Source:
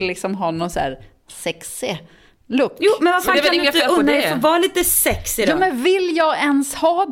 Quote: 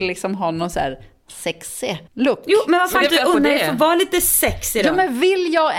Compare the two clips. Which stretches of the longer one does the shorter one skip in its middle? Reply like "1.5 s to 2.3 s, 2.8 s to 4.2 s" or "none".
2.1 s to 2.4 s, 3.4 s to 3.7 s